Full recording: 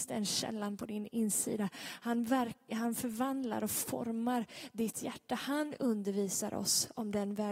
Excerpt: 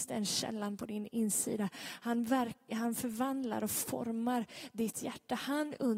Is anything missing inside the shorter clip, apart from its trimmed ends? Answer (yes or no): no